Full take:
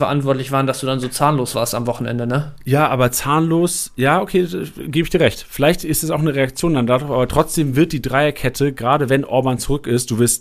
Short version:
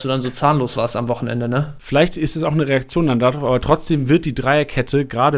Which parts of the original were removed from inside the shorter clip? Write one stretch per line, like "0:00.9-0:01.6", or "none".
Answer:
0:02.6-0:05.5